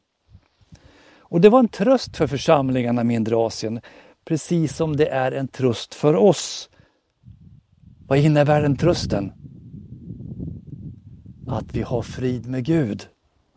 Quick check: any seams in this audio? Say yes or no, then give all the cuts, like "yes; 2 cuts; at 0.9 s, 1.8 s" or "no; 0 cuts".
no; 0 cuts